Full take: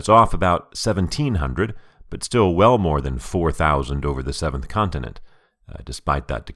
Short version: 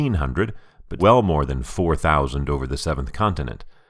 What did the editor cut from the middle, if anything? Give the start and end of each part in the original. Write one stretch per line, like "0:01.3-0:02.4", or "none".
0:02.2-0:02.5